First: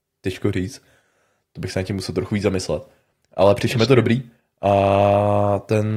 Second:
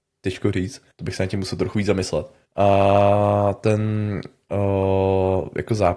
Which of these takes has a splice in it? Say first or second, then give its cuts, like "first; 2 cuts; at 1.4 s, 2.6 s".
second; 2 cuts; at 0.9 s, 2.5 s